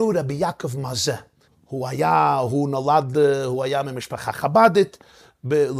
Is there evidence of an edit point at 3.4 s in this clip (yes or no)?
no